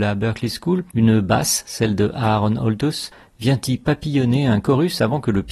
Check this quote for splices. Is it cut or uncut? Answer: uncut